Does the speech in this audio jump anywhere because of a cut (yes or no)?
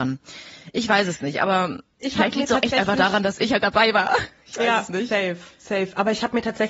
yes